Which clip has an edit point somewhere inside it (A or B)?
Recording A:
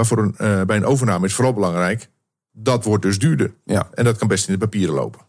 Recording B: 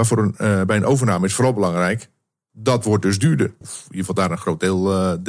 B